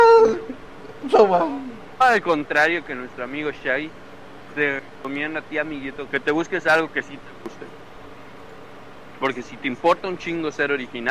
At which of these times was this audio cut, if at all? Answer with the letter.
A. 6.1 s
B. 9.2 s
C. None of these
A